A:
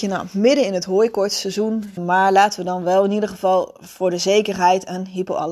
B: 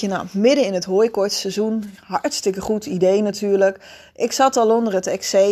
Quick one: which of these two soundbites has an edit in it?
A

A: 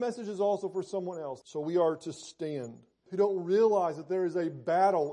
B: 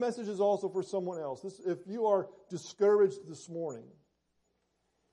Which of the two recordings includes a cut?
A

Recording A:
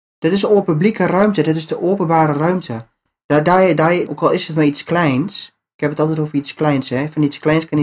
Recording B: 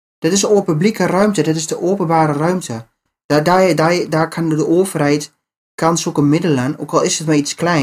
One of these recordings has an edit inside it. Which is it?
A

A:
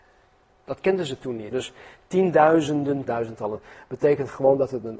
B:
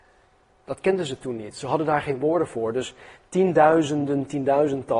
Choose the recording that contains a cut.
A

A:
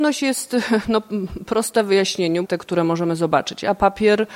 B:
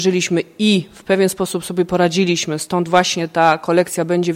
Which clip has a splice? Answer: A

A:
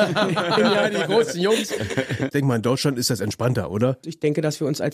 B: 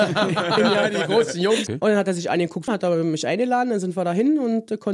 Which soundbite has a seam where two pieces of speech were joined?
B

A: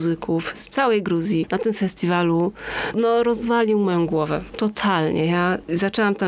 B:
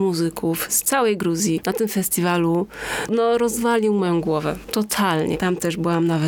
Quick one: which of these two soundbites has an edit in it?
B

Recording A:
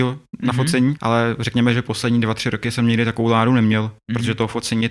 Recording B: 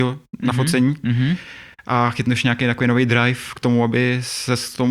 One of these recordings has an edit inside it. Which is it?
A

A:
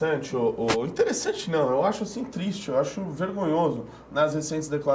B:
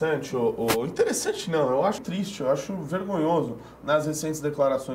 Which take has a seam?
B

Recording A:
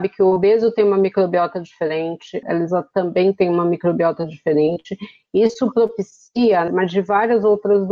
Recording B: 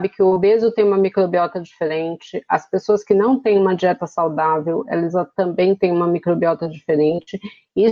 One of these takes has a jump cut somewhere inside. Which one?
A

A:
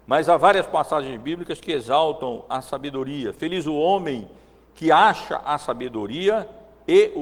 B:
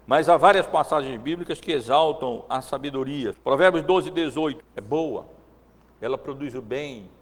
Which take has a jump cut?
B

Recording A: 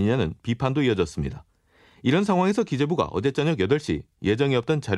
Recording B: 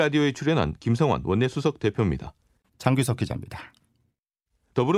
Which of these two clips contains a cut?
B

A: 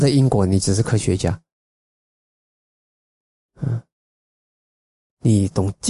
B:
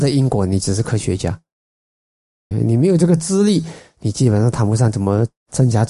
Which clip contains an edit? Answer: B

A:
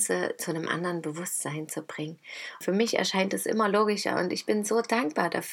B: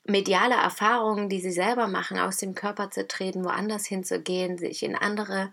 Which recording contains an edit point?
A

